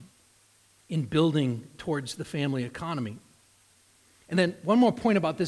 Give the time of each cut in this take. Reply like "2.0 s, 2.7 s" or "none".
none